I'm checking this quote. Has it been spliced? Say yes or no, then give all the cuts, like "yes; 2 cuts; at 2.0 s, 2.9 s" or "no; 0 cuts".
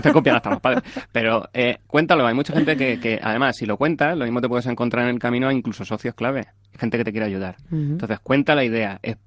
no; 0 cuts